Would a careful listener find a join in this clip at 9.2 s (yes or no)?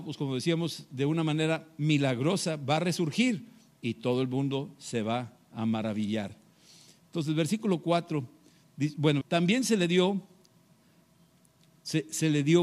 yes